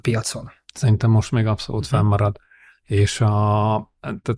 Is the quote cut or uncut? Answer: uncut